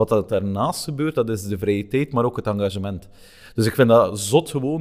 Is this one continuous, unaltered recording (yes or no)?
yes